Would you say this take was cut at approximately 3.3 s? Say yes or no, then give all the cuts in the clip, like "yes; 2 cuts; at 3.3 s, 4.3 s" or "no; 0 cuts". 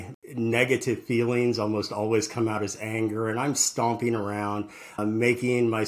no; 1 cut; at 5.0 s